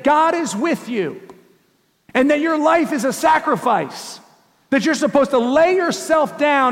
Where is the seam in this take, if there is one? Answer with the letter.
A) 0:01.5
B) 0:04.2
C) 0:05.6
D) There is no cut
D